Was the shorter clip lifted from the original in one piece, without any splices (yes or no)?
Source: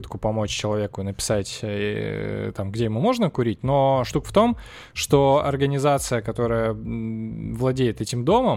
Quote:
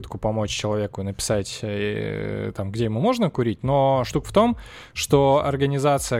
yes